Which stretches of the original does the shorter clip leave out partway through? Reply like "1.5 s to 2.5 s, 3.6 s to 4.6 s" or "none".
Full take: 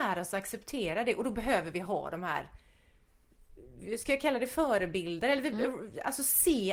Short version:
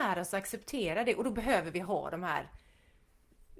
none